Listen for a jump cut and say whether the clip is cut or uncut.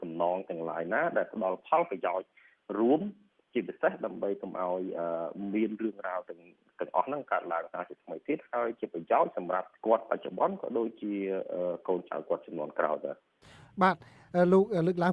cut